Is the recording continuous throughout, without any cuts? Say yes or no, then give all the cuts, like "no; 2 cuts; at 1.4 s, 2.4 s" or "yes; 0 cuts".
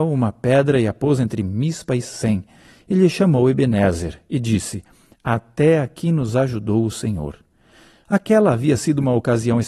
yes; 0 cuts